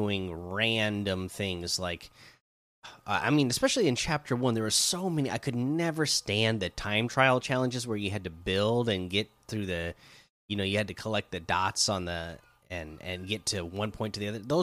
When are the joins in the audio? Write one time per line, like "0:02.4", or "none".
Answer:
none

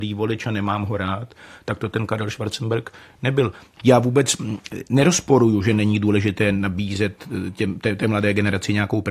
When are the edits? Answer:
0:03.8

